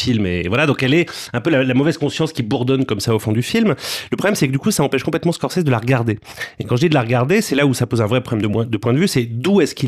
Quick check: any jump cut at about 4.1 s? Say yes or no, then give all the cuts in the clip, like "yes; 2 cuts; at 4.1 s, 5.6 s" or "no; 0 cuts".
no; 0 cuts